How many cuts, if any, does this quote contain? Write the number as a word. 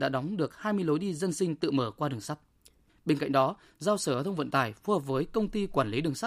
one